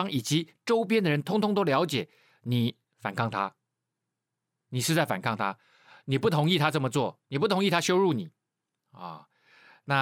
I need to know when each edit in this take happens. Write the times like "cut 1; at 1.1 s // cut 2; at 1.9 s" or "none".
cut 1; at 2.8 s